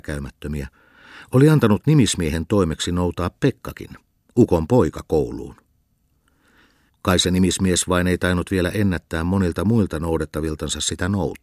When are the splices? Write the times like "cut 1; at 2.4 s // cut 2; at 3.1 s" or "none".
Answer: none